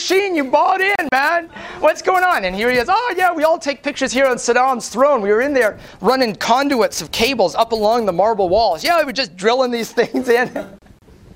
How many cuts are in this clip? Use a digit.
0